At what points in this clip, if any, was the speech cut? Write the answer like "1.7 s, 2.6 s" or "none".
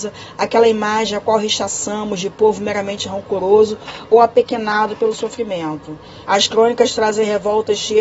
6.2 s